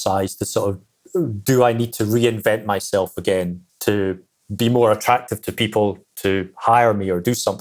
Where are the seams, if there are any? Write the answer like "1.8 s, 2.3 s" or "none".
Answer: 3.7 s